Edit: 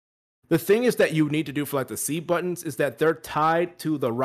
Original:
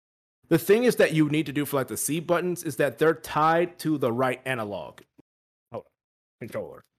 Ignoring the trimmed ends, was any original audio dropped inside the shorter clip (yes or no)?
no